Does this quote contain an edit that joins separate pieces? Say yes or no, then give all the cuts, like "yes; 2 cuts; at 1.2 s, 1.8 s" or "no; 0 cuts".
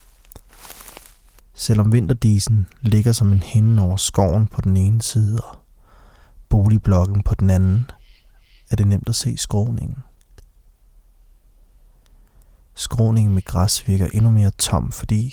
yes; 1 cut; at 1.4 s